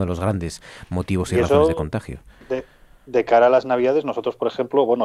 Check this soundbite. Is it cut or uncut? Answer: uncut